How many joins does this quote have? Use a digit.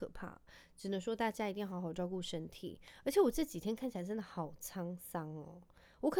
0